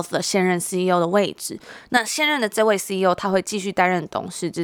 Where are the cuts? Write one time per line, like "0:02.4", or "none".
none